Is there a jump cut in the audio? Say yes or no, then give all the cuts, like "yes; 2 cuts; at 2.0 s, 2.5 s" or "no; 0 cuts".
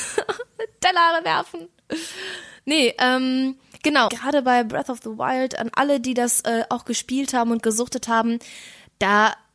yes; 1 cut; at 4.1 s